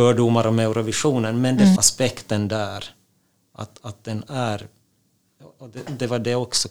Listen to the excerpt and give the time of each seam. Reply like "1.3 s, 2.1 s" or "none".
1.8 s